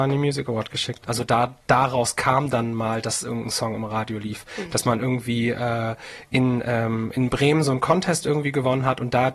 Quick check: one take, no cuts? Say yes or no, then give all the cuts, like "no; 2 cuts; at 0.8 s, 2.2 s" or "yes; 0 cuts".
no; 1 cut; at 1.0 s